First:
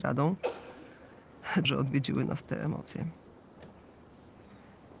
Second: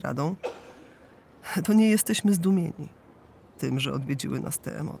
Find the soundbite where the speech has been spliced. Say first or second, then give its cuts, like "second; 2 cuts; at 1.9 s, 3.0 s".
first; 1 cut; at 1.6 s